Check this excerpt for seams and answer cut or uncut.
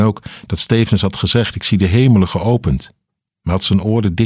uncut